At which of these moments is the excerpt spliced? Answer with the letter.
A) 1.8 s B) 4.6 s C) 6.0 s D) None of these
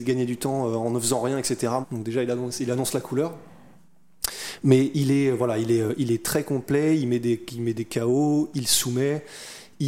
A